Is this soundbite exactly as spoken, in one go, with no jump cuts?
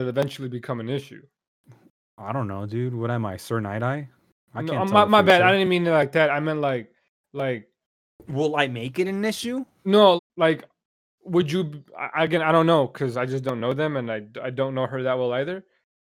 no; 1 cut; at 10.2 s

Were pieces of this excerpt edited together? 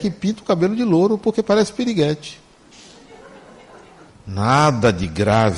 yes; 1 cut; at 4.1 s

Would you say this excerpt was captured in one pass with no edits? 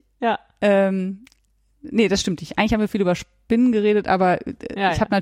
yes; 0 cuts

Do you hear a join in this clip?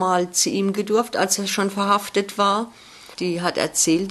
no; 0 cuts

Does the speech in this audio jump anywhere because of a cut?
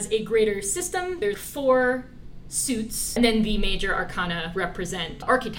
no; 0 cuts

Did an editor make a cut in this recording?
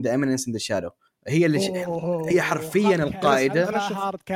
no; 0 cuts

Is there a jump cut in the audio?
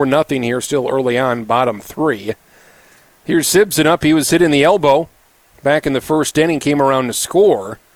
no; 0 cuts

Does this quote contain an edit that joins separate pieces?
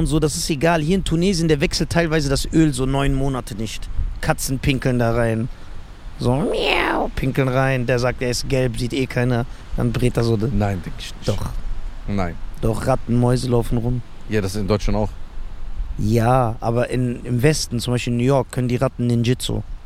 no; 0 cuts

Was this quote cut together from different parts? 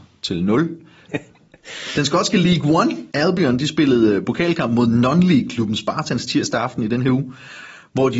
yes; 2 cuts; at 1.1 s, 3.1 s

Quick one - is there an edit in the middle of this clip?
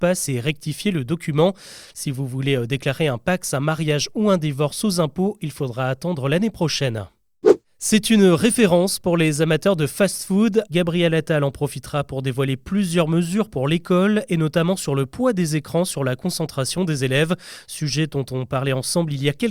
yes; 2 cuts; at 1.9 s, 10.7 s

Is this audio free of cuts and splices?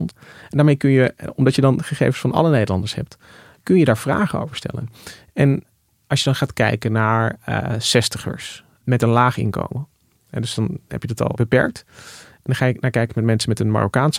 yes; 0 cuts

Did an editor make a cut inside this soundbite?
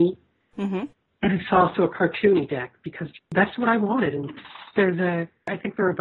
no; 0 cuts

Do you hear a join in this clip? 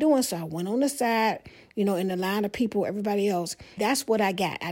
yes; 1 cut; at 3.8 s

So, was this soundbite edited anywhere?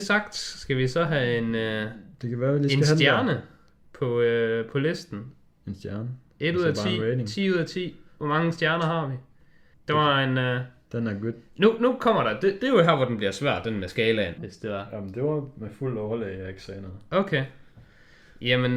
yes; 2 cuts; at 9.7 s, 14.4 s

